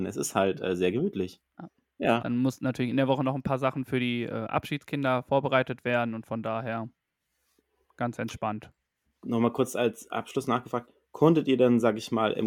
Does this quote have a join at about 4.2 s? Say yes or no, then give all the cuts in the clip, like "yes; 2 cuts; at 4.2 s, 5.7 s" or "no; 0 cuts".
no; 1 cut; at 2.2 s